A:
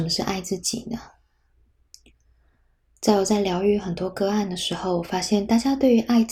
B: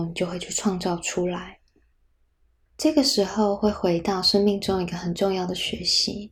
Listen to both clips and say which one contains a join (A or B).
B